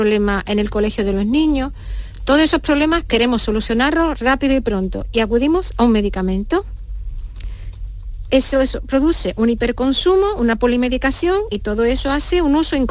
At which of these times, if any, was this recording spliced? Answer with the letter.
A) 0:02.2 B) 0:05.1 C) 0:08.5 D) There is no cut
D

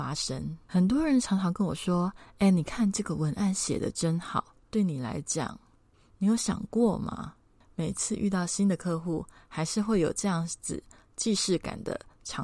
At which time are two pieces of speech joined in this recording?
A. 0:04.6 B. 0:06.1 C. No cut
A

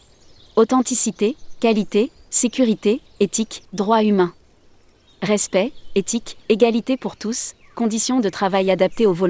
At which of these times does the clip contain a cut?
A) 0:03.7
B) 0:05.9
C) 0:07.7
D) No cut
A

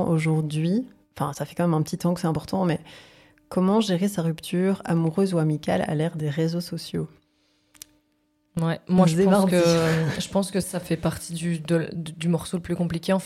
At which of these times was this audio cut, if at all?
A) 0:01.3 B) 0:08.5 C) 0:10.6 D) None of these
C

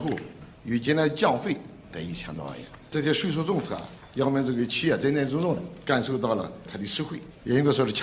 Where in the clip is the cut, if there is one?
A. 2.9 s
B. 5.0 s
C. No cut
C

